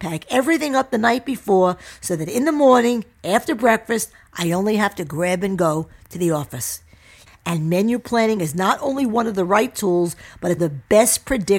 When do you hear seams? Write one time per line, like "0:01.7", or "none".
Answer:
0:07.3
0:10.6